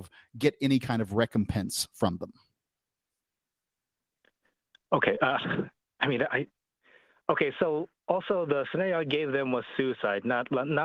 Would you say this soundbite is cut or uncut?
uncut